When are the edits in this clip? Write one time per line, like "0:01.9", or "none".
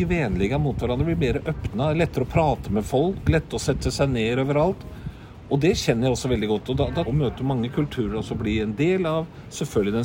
0:07.1